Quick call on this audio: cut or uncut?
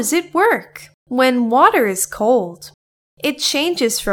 cut